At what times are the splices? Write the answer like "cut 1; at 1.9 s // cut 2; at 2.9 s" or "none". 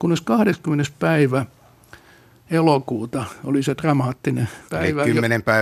cut 1; at 4.7 s